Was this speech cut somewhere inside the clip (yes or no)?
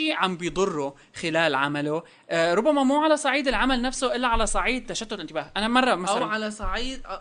no